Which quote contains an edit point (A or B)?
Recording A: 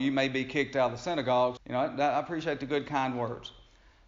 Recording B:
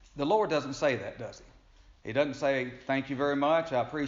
A